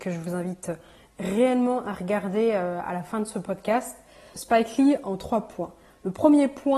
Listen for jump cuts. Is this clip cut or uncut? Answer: cut